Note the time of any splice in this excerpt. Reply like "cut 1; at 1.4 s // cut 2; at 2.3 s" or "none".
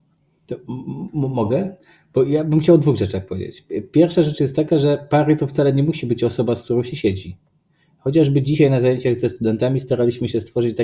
none